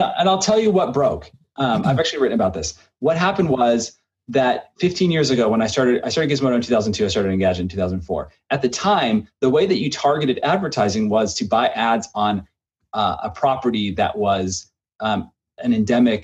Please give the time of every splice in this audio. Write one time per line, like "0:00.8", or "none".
none

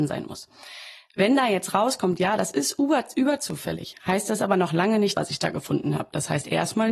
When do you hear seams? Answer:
0:05.1

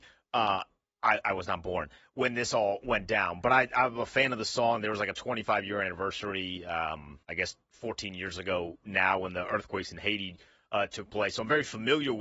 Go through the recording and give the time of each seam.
0:07.2

